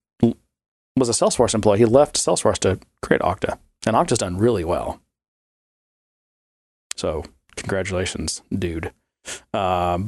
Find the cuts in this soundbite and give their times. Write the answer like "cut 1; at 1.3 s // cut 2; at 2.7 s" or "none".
none

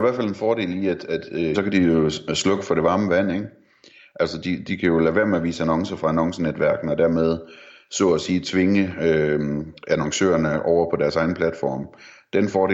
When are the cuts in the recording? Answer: cut 1; at 1.5 s

